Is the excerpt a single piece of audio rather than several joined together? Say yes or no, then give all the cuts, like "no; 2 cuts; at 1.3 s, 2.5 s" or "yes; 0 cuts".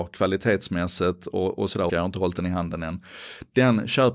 no; 1 cut; at 1.9 s